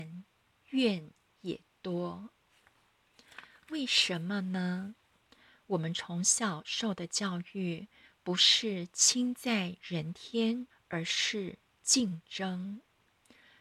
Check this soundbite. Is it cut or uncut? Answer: cut